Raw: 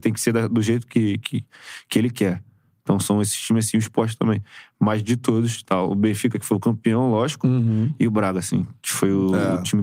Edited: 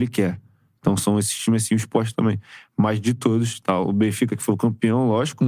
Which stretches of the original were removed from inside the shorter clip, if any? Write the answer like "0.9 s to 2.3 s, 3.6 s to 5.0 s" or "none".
none